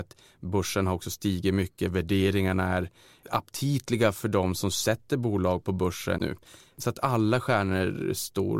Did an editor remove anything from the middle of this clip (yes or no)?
yes